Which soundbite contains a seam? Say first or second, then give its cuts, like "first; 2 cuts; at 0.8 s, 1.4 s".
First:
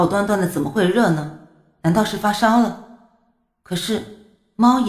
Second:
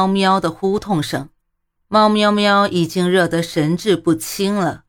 second; 1 cut; at 1.8 s